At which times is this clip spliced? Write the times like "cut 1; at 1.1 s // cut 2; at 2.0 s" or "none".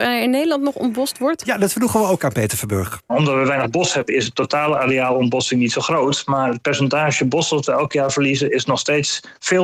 cut 1; at 3.1 s

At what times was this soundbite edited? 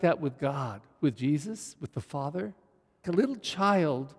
cut 1; at 3.0 s

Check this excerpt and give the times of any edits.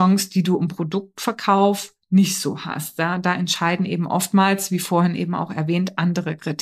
none

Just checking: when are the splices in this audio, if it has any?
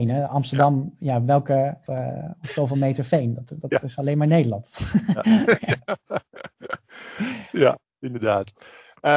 cut 1; at 1.9 s

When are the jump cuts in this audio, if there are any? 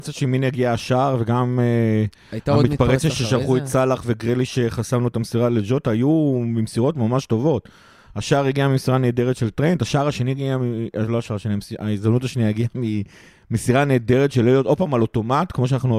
none

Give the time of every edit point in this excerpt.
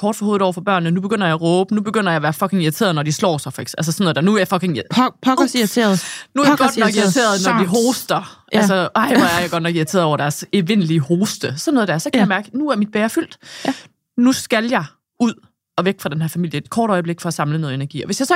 none

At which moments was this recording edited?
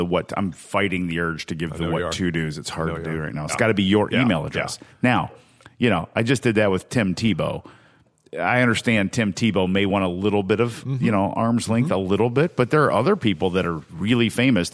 cut 1; at 3.5 s

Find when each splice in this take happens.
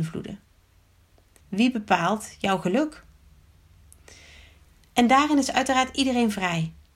cut 1; at 1.4 s

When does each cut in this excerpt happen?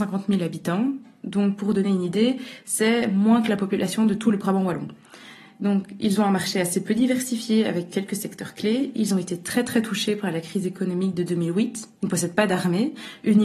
none

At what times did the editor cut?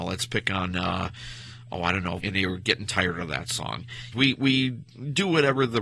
cut 1; at 2.2 s // cut 2; at 4.1 s

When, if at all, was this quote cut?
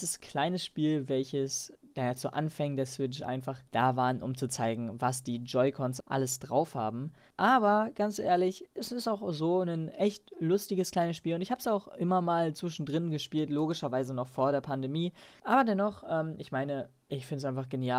cut 1; at 3.7 s // cut 2; at 15.4 s

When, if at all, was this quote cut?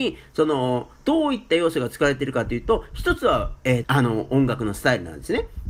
cut 1; at 1.0 s // cut 2; at 3.8 s

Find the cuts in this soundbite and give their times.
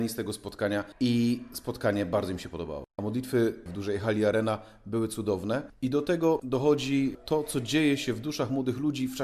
cut 1; at 3.7 s

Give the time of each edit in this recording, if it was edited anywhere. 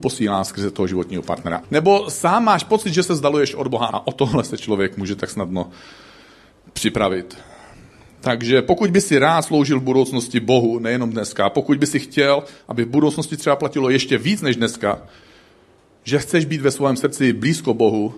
cut 1; at 1.6 s // cut 2; at 3.9 s

